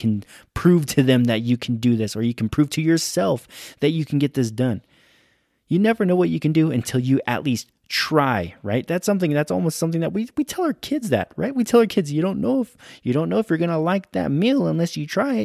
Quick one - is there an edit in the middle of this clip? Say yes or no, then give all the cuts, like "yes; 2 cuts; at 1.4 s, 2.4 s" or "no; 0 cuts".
no; 0 cuts